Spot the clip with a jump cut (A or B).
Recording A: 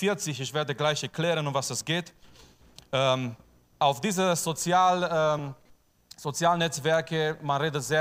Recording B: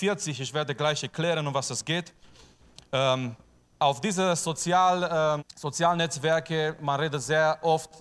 B